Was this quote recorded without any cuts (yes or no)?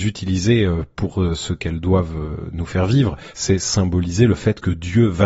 no